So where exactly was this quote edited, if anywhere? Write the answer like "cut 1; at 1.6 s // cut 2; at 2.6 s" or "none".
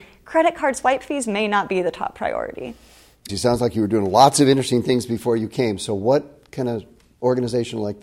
cut 1; at 3.3 s